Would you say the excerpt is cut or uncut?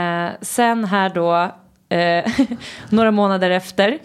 uncut